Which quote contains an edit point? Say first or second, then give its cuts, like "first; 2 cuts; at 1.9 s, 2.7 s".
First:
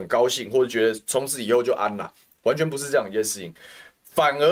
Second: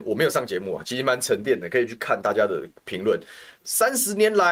second; 1 cut; at 3.6 s